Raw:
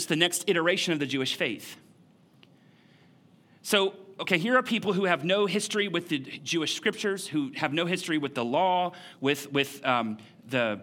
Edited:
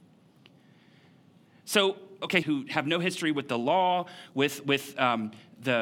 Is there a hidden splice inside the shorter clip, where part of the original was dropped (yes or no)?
yes